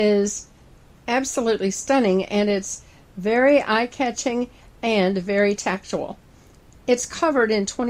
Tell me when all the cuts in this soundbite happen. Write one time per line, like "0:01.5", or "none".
none